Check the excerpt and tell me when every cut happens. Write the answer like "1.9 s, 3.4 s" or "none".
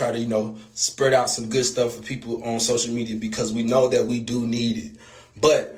none